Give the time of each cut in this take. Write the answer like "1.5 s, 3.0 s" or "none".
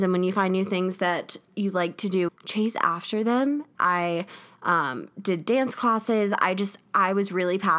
2.3 s, 3.7 s